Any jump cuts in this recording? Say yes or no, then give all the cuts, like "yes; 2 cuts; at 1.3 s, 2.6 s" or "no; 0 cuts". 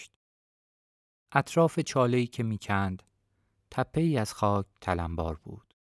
no; 0 cuts